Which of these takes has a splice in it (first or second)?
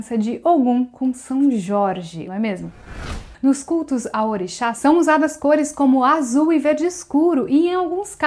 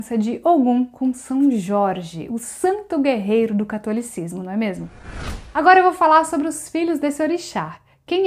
first